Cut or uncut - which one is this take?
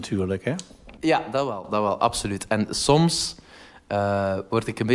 uncut